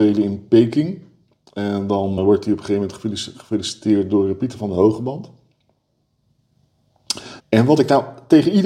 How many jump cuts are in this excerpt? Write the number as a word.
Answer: two